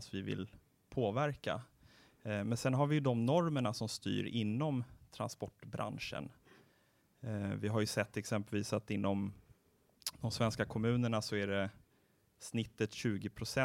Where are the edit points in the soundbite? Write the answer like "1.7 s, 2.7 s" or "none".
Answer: none

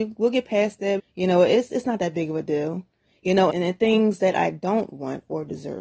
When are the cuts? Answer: 1.0 s, 3.5 s

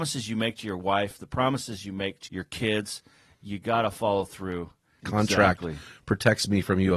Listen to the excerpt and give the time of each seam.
2.3 s, 5.0 s

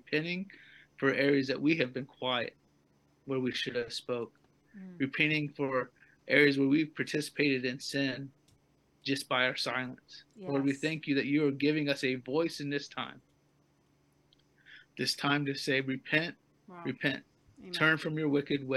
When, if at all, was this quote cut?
none

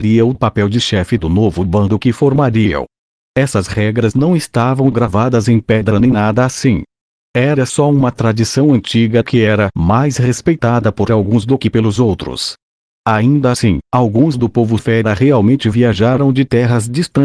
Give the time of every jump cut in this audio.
none

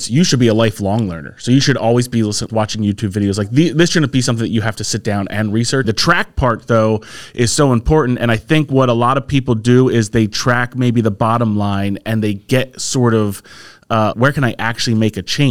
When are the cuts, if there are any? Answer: 2.5 s, 5.8 s, 14.1 s

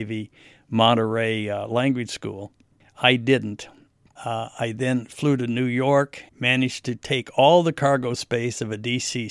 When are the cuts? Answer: 4.2 s, 6.3 s

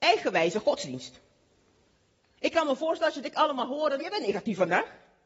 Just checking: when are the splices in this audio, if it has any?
2.4 s, 4.0 s

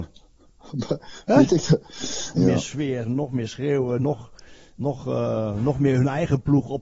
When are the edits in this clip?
2.4 s

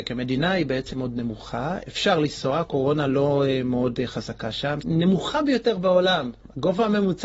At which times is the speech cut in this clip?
0.9 s, 4.8 s

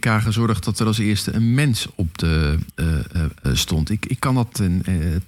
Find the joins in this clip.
3.5 s

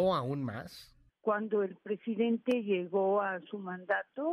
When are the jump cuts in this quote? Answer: 1.1 s

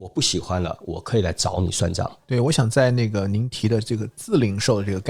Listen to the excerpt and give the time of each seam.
2.2 s

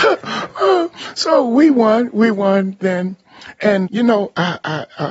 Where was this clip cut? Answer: 3.9 s

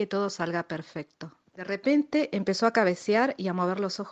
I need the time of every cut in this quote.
1.5 s

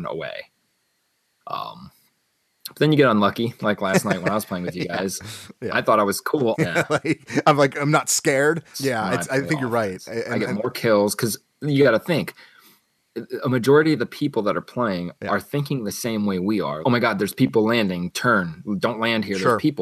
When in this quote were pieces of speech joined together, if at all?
6.5 s, 8.7 s, 16.8 s

